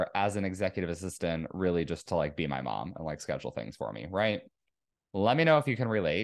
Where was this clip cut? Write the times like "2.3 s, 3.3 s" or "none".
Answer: none

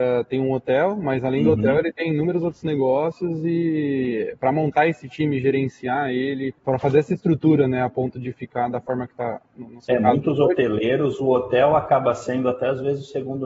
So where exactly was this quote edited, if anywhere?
6.6 s

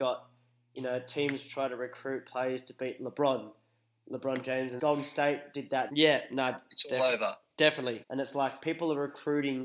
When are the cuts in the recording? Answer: 4.8 s, 5.9 s, 8.0 s

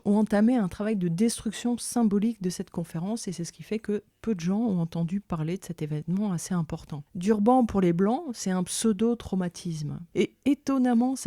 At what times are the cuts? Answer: 7.1 s, 10.1 s

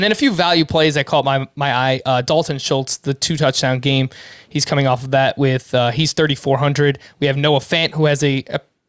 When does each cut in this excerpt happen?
none

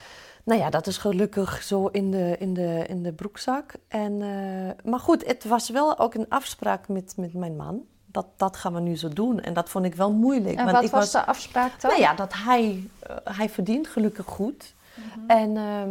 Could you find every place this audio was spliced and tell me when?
none

